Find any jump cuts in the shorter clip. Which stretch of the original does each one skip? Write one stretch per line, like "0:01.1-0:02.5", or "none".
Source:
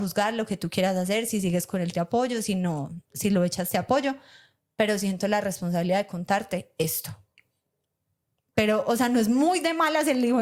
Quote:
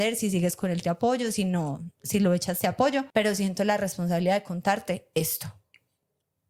0:04.2-0:04.7